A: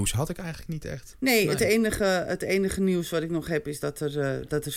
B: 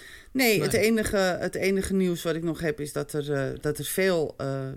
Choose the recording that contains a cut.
A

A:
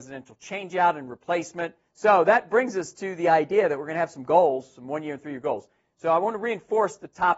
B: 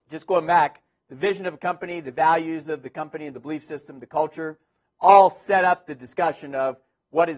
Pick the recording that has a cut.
A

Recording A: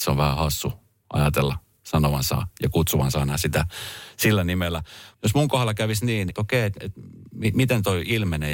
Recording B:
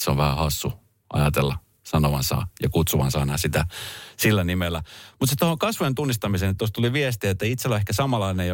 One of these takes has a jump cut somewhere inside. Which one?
A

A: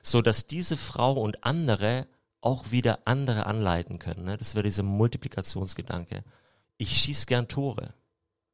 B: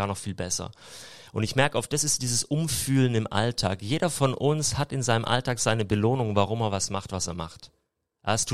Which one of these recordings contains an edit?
A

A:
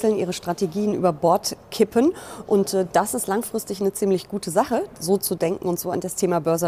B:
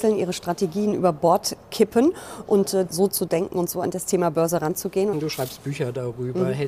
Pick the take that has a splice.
B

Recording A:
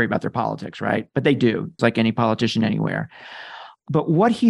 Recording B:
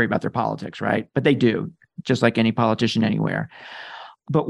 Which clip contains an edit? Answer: A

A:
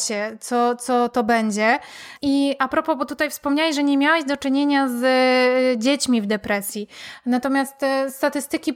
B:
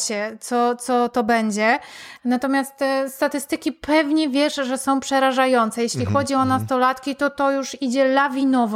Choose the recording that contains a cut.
B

